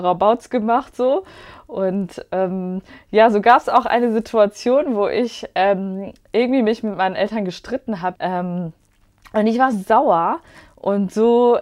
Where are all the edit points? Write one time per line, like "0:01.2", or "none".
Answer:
0:08.1
0:09.7